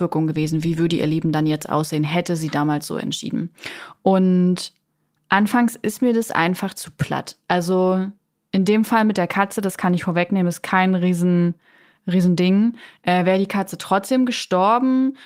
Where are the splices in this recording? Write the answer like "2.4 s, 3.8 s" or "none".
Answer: none